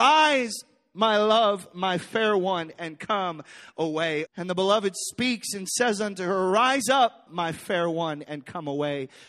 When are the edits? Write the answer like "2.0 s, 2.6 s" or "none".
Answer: 4.3 s, 7.3 s